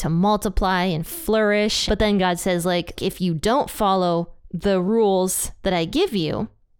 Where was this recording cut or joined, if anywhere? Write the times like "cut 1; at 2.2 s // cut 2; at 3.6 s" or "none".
cut 1; at 1.9 s // cut 2; at 3.0 s